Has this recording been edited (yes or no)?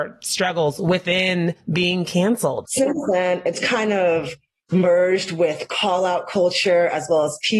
yes